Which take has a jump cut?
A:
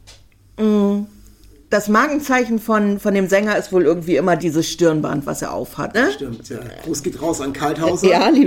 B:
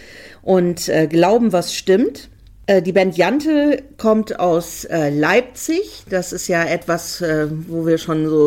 A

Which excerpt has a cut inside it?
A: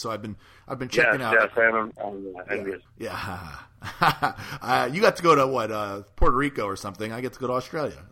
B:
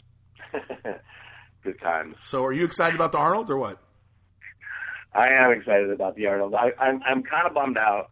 A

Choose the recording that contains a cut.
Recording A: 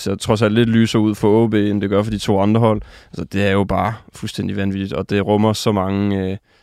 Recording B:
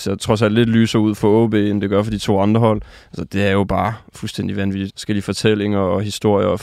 B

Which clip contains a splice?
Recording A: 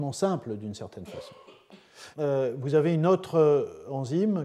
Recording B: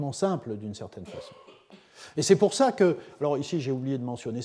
A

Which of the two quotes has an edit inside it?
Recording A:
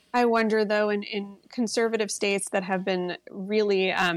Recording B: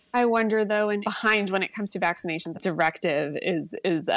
B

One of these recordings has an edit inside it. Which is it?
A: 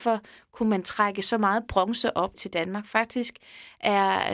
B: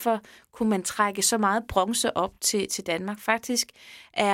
A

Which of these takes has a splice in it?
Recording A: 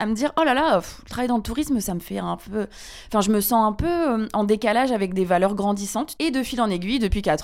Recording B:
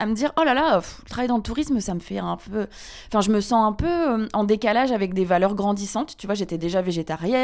A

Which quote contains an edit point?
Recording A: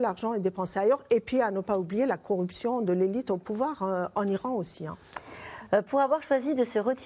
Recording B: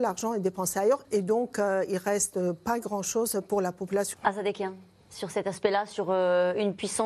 B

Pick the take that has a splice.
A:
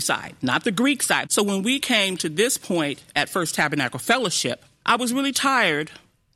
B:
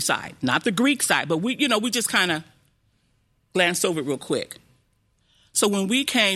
A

